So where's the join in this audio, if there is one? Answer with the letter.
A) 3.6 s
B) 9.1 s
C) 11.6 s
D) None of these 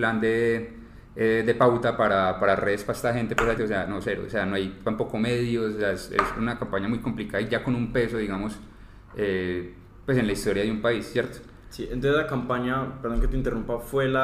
A